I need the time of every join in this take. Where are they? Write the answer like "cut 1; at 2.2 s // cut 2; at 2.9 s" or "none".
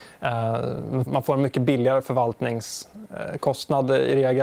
cut 1; at 1.1 s

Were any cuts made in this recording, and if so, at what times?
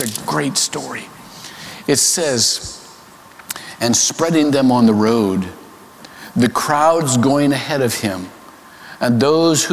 none

